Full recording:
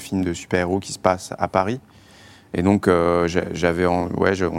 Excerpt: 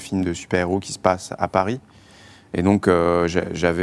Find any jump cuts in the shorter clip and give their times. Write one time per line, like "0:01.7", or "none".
none

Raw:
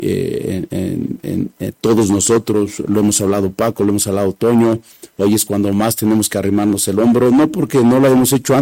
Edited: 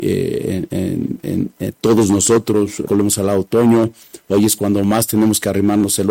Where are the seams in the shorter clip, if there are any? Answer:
0:02.9

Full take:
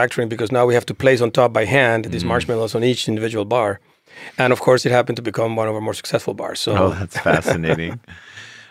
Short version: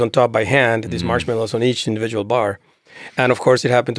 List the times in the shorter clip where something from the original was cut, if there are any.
none

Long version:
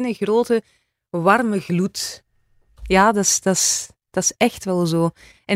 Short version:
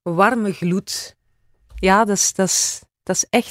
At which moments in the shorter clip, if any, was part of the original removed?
none

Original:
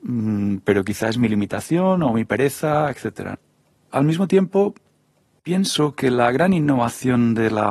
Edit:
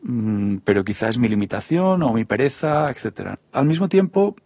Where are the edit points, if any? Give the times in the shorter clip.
0:03.5

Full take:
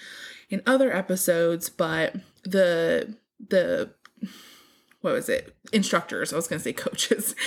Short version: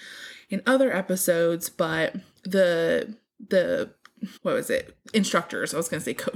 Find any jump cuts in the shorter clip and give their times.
0:04.4

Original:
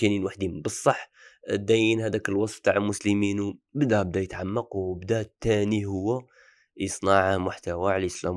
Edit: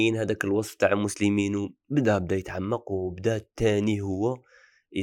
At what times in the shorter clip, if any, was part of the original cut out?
none

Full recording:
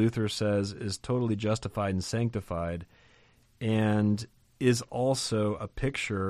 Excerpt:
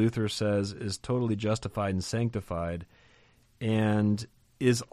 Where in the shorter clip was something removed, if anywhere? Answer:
none

